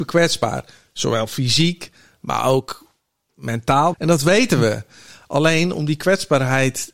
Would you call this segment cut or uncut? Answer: cut